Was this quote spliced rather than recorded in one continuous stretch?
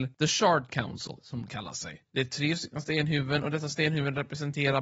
yes; 1 cut; at 1.2 s

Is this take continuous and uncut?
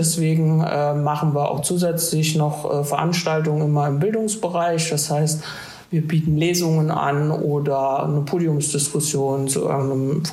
yes; 0 cuts

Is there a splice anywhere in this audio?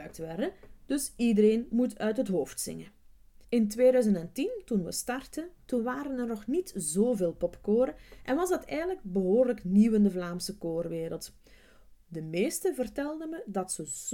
yes; 2 cuts; at 3.4 s, 12.0 s

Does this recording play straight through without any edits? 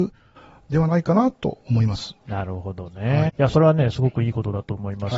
no; 2 cuts; at 2.2 s, 3.3 s

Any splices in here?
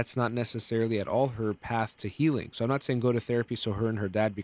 no; 0 cuts

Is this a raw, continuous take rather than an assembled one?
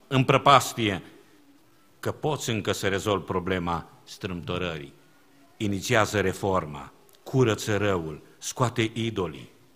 yes; 0 cuts

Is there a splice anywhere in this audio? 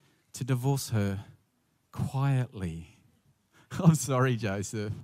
yes; 1 cut; at 3.2 s

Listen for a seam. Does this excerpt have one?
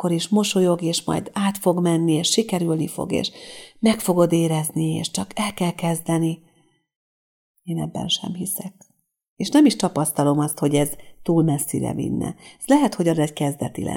no; 0 cuts

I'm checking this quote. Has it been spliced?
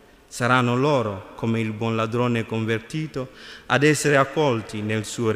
no; 0 cuts

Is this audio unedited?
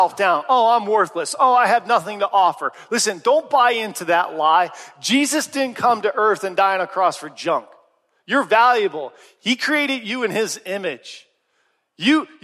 yes; 0 cuts

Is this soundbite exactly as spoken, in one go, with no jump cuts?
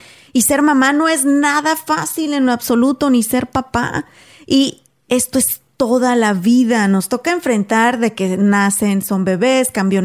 yes; 0 cuts

